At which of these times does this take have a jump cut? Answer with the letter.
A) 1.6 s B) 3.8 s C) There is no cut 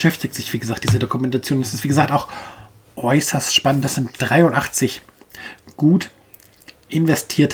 C